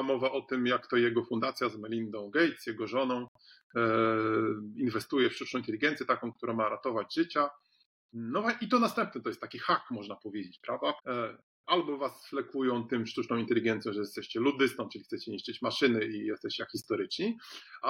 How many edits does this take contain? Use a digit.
1